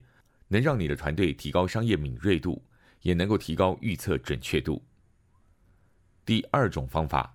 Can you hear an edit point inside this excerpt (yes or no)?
no